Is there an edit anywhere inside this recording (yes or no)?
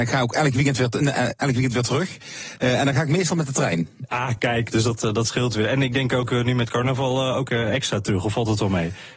no